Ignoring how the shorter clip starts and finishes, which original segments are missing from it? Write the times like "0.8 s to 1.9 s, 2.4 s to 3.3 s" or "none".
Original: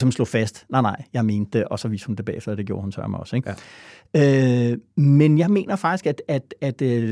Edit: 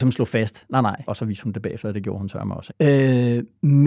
1.1 s to 1.7 s, 3.3 s to 4.0 s

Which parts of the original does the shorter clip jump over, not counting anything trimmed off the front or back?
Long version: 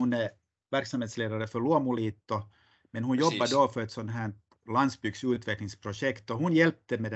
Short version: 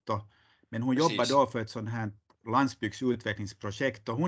none

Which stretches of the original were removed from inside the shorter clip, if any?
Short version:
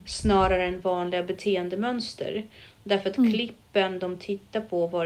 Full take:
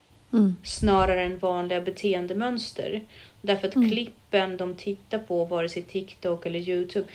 none

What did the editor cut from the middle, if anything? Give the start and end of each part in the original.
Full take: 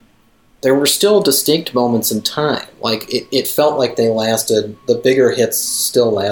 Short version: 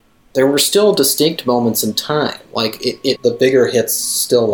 3.4 s to 4.8 s

